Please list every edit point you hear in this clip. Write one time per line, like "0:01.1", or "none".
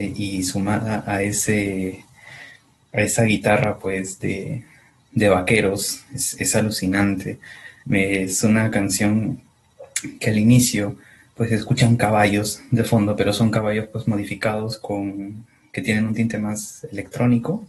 0:07.8